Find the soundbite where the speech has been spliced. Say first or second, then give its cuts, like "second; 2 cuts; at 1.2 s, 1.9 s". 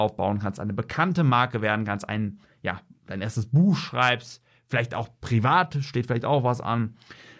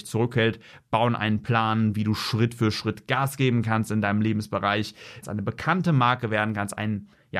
second; 1 cut; at 5.2 s